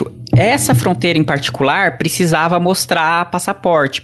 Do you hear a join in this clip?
no; 0 cuts

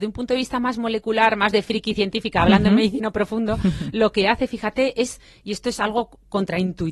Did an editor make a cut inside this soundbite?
no; 0 cuts

